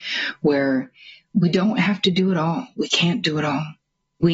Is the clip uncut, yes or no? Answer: yes